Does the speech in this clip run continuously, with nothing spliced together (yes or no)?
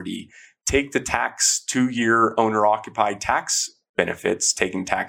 yes